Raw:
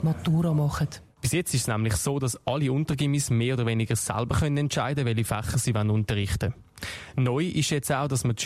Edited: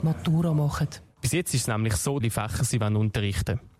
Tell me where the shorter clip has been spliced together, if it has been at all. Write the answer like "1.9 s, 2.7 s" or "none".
2.2 s